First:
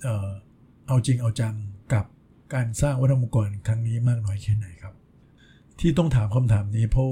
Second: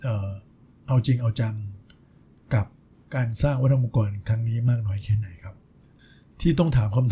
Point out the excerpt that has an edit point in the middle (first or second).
first